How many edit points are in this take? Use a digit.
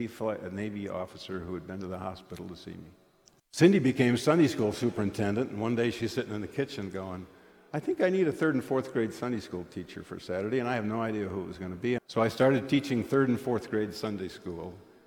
2